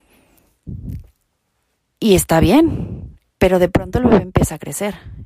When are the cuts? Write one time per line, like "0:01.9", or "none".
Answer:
0:03.3

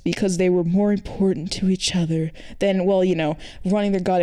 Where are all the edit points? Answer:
none

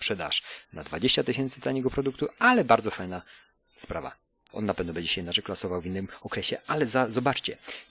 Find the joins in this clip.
0:04.5

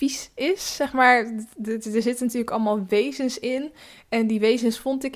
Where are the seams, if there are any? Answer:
none

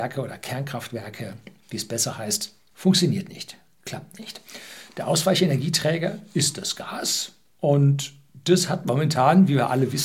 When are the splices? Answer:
0:02.7

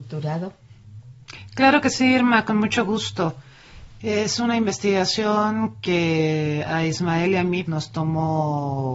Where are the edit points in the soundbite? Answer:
0:04.0
0:07.6

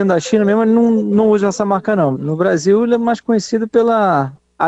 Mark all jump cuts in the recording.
0:02.1

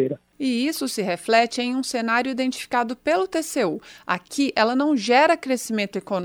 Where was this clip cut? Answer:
0:04.5

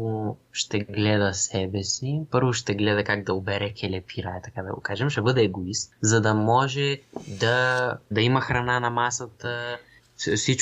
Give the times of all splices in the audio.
0:08.1

